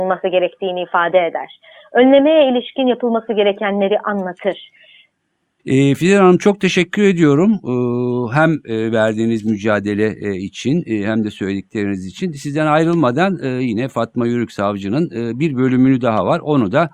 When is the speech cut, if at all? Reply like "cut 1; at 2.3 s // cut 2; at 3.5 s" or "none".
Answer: cut 1; at 5.6 s